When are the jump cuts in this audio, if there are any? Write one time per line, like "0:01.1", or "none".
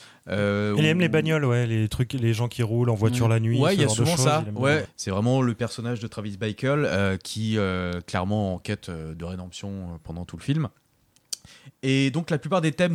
0:04.9